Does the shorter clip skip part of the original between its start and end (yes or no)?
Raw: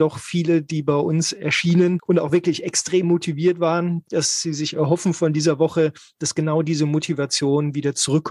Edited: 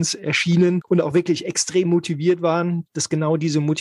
yes